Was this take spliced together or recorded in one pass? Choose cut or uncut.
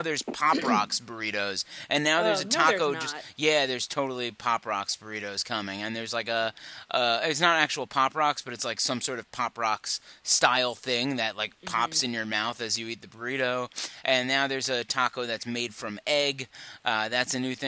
uncut